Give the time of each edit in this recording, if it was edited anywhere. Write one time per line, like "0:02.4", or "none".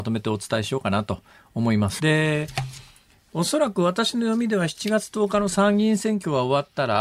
0:02.0